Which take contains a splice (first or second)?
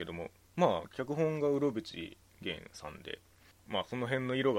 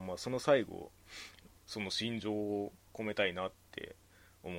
second